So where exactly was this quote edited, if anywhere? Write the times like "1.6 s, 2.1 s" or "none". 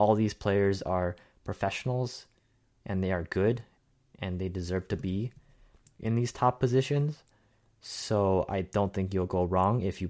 none